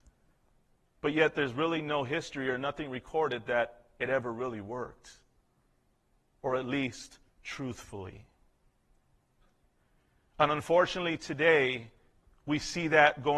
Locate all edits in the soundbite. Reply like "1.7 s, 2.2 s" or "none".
none